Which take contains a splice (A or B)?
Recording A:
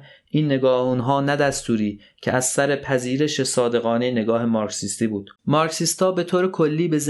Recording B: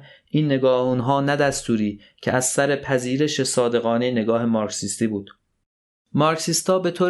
A